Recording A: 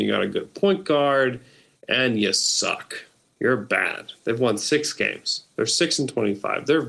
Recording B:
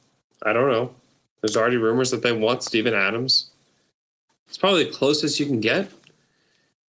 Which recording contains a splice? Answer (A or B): B